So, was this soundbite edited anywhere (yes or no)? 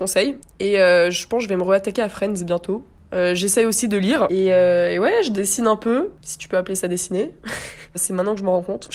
no